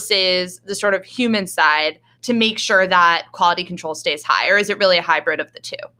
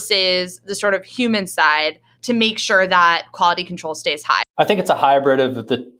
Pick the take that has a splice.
second; 1 cut; at 4.4 s

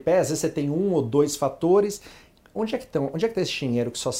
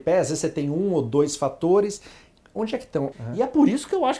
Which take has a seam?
second; 1 cut; at 3.1 s

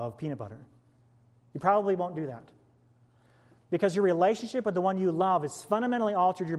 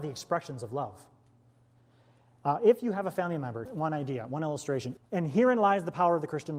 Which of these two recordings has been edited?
second; 2 cuts; at 3.7 s, 5.0 s

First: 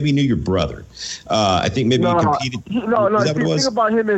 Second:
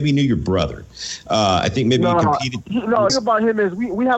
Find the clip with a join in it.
second; 1 cut; at 3.1 s

